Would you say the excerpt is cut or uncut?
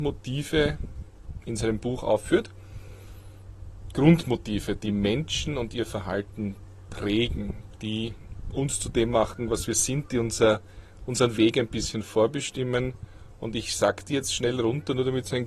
uncut